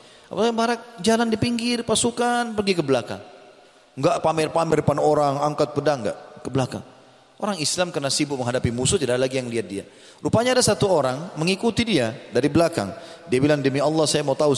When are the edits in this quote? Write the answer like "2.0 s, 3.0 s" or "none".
none